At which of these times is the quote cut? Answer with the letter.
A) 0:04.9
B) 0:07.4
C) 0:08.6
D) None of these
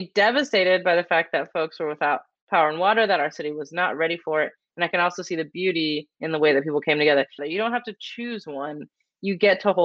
B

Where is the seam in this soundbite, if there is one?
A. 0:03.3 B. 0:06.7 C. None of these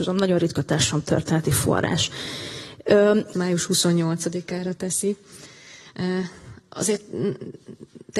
A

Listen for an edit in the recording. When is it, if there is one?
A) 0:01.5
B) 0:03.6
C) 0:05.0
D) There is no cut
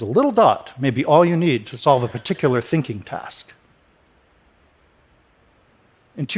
D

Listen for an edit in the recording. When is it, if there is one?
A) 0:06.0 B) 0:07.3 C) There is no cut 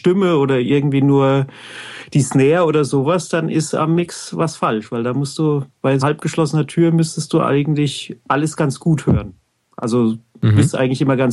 A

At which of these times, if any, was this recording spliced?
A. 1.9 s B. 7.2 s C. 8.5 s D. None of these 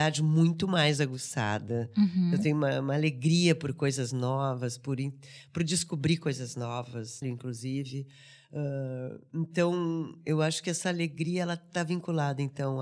B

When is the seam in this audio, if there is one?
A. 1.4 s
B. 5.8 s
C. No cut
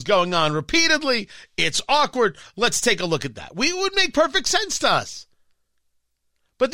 C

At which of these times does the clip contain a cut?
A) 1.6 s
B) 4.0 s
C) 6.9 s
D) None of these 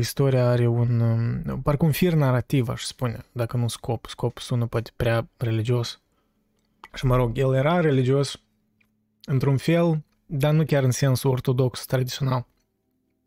C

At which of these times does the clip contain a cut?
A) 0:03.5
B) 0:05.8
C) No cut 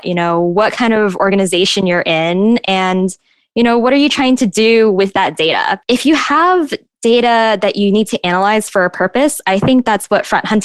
B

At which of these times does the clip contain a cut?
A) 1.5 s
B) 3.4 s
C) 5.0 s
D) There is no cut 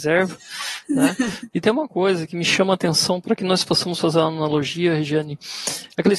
A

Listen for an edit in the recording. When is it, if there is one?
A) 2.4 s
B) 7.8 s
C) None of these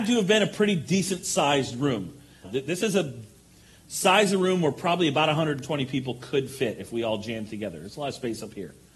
A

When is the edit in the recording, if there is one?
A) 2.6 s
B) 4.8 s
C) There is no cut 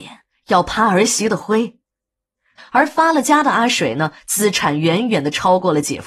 A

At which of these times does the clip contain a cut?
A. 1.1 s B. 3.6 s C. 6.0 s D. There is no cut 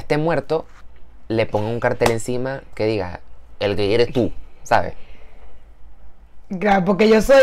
D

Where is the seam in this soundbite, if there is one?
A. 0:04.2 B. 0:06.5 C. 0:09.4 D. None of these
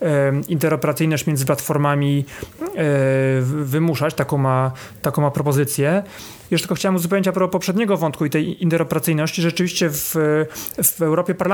B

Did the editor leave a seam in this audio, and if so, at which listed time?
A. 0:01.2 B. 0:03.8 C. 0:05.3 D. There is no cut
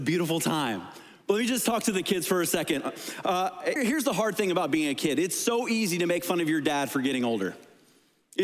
B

